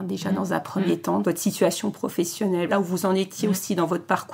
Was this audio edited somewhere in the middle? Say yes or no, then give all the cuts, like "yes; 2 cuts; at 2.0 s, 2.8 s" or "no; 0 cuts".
yes; 2 cuts; at 1.2 s, 2.7 s